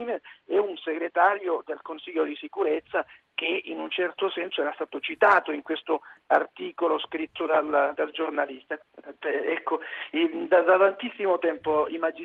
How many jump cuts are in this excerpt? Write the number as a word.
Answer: one